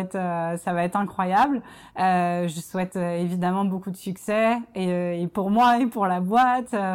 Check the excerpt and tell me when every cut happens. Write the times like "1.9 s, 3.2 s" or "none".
none